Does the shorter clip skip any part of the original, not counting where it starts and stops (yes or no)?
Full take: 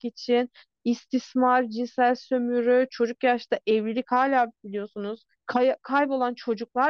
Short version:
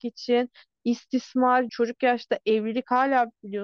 yes